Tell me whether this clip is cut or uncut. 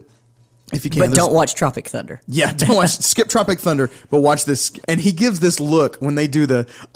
cut